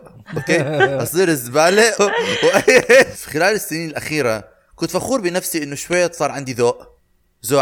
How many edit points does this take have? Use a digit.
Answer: 2